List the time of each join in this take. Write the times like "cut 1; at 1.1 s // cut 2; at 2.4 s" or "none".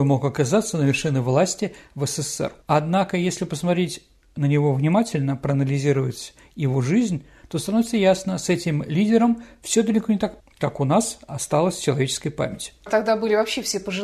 cut 1; at 2.6 s // cut 2; at 10.4 s // cut 3; at 12.9 s